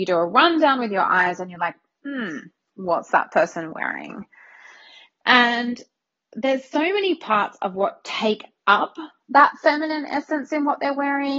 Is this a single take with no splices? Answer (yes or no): yes